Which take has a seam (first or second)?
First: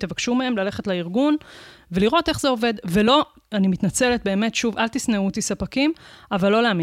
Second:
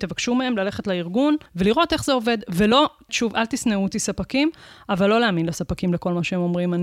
second